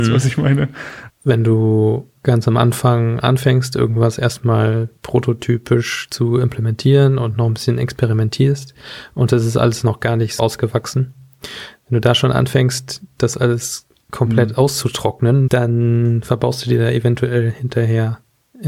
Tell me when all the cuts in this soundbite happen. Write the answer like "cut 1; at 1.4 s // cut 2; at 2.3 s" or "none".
cut 1; at 1.1 s // cut 2; at 10.4 s // cut 3; at 15.5 s